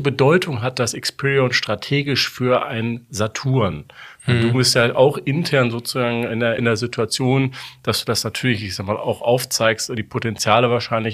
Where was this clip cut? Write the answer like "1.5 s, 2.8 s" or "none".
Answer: 6.6 s